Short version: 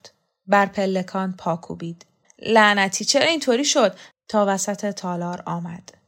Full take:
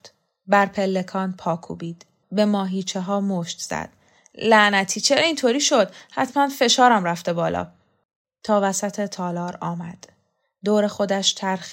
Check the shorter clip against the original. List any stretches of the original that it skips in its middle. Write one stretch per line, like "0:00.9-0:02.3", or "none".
0:02.2-0:04.2
0:06.1-0:08.3